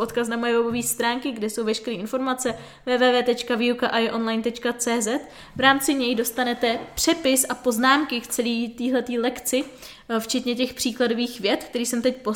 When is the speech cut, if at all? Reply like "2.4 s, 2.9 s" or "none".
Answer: none